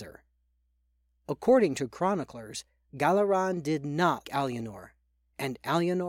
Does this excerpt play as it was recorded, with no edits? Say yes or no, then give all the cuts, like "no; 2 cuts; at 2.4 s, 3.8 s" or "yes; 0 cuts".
no; 1 cut; at 4.2 s